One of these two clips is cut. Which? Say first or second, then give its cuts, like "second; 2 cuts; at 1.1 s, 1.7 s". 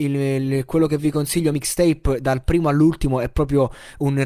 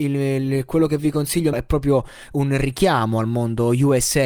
second; 1 cut; at 1.5 s